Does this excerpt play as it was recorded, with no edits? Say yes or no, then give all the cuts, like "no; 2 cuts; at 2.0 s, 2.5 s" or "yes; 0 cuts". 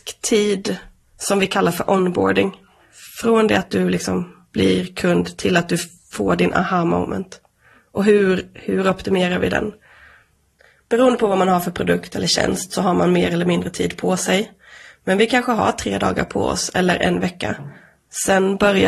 yes; 0 cuts